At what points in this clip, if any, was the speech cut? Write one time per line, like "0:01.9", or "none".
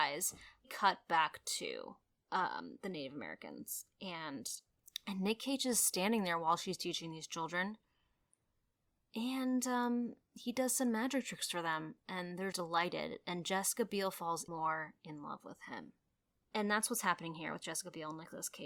0:12.5
0:14.5
0:16.4